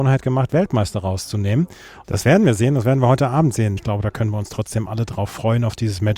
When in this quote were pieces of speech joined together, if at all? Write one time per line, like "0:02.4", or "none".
0:02.0
0:03.8